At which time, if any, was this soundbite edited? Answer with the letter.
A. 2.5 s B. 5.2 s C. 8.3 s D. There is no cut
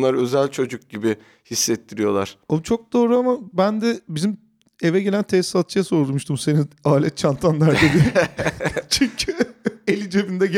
D